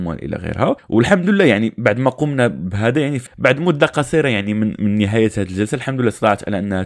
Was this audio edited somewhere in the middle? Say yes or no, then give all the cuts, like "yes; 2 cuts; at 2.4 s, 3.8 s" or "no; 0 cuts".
no; 0 cuts